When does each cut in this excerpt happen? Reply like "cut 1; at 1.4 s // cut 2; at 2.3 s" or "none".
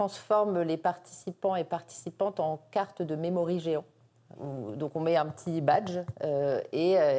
cut 1; at 4.3 s

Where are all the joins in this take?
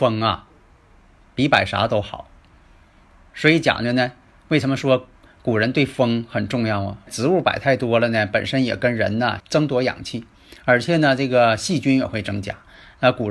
cut 1; at 7.1 s // cut 2; at 9.4 s

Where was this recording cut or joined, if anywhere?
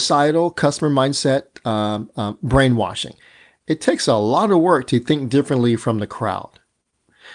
none

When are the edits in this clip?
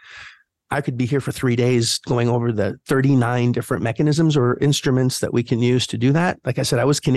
none

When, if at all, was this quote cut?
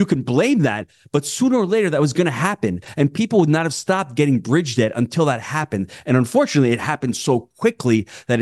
none

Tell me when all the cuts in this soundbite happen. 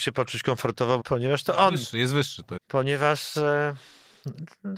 cut 1; at 1.0 s // cut 2; at 2.6 s

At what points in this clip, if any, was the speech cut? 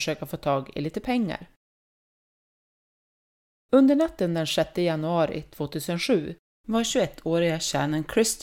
none

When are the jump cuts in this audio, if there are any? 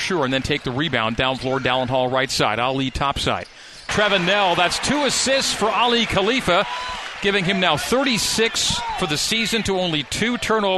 cut 1; at 3.9 s

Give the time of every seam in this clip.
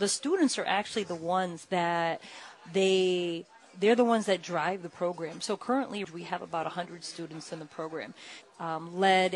cut 1; at 6.0 s // cut 2; at 8.4 s

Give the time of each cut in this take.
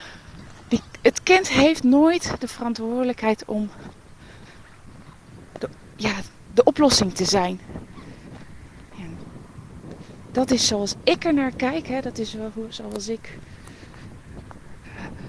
cut 1; at 8.9 s

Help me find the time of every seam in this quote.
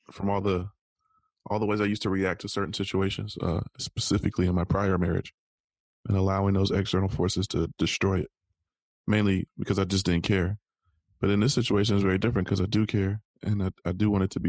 none

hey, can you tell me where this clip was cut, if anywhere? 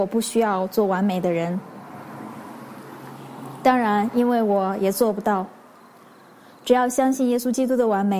none

